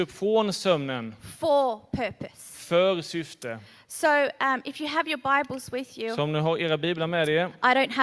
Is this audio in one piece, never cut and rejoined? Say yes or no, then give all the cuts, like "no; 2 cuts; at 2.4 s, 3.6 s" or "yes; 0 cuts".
yes; 0 cuts